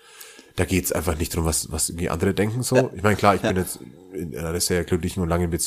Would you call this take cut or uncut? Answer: uncut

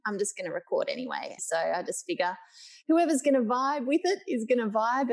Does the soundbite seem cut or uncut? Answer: cut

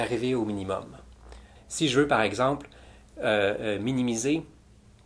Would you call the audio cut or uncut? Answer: cut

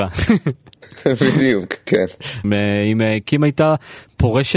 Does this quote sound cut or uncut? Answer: cut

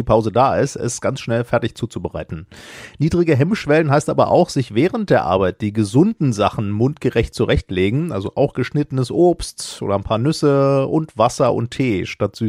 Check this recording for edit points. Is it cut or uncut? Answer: uncut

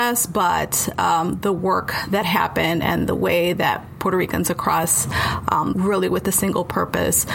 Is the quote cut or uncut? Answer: cut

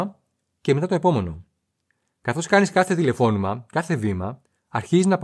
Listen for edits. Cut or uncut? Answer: uncut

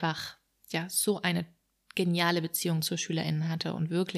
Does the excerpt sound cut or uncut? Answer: uncut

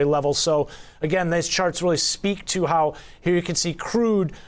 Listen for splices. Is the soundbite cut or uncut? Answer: uncut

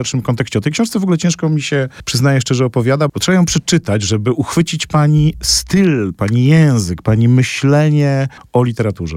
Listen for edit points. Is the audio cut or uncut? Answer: cut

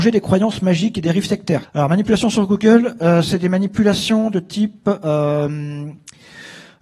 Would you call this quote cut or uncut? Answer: cut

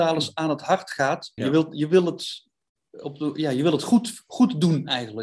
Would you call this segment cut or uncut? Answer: cut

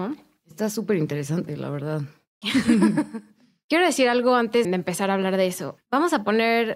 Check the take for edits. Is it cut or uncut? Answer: cut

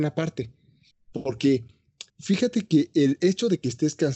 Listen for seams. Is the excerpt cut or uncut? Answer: cut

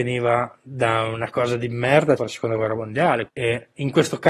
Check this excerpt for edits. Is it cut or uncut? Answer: cut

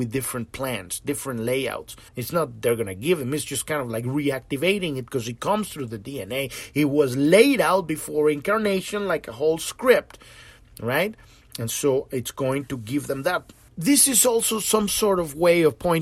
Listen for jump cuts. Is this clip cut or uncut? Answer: cut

